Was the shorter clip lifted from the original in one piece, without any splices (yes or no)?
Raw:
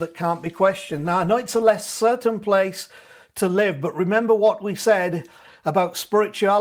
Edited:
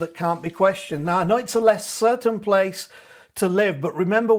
yes